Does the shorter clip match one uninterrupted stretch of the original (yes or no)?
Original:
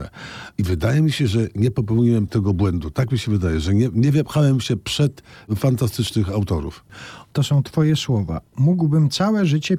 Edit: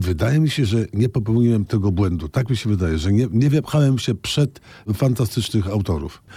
yes